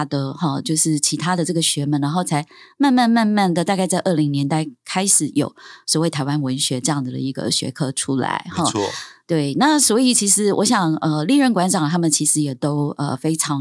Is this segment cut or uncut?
uncut